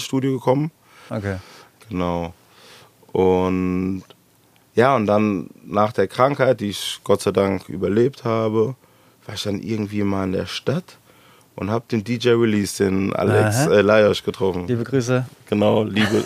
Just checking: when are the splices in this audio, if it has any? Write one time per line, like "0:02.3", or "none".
0:01.1

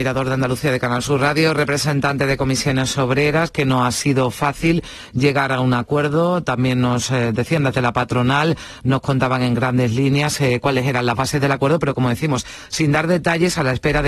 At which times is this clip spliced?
none

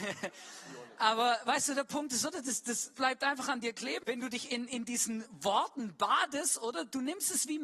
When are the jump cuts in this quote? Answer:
0:02.9
0:04.0

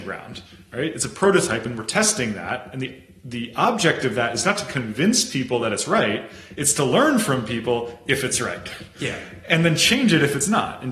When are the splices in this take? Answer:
none

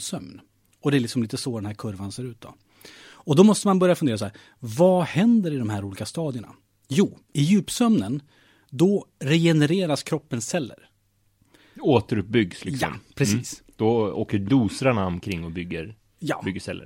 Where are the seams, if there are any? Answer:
none

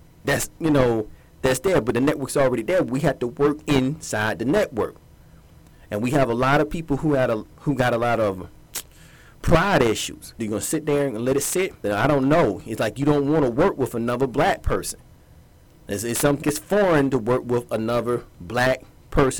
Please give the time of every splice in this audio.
0:10.4
0:11.8
0:16.4

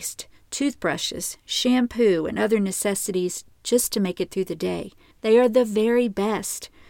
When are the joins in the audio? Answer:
0:05.1

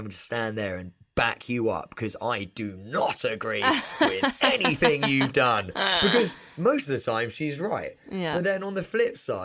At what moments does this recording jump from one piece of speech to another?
none

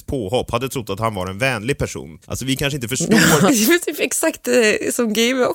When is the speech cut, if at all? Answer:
0:02.2
0:03.5

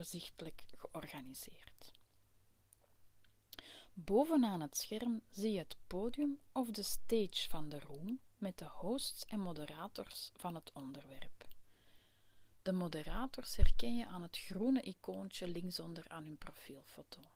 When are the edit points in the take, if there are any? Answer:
none

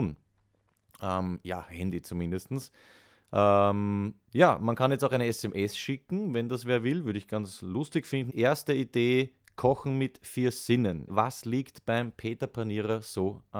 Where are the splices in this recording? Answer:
0:08.3
0:11.1

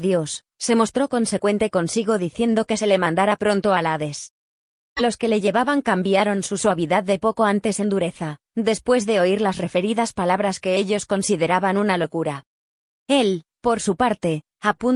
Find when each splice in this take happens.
0:04.8

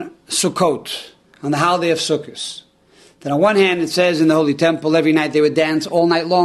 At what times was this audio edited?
none

